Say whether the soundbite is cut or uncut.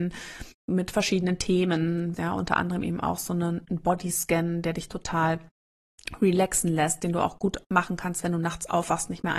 cut